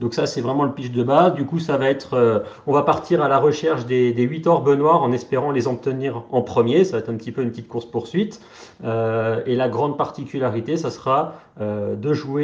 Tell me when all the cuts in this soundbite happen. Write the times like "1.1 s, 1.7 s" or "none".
none